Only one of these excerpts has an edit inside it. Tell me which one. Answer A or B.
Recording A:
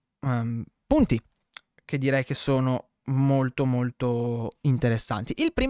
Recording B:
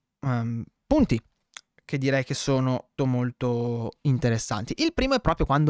B